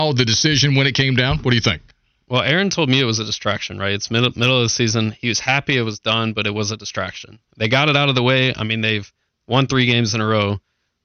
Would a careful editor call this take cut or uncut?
uncut